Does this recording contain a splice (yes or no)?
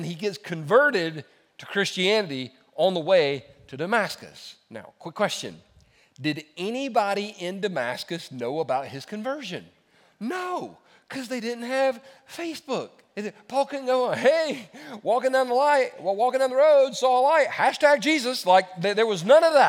no